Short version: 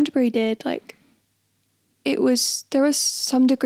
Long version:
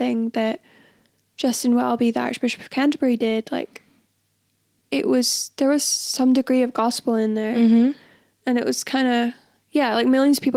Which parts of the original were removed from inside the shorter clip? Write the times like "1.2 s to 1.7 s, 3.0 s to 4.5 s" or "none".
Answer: none